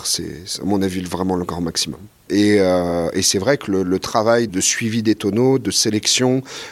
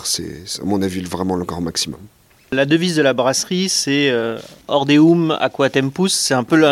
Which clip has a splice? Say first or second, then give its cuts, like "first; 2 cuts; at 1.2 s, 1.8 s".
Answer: first; 2 cuts; at 2.3 s, 4.5 s